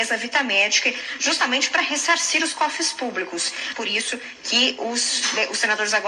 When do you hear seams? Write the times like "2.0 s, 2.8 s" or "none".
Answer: 3.7 s